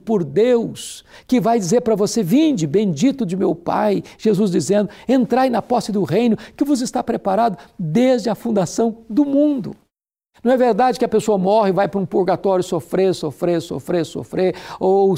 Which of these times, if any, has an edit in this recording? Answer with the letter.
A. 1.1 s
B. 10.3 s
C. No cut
B